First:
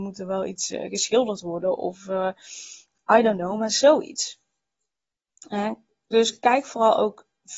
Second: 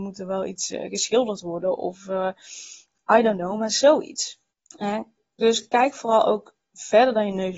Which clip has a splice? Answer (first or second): second